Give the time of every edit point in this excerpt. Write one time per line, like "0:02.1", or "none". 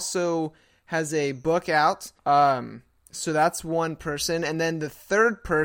0:02.2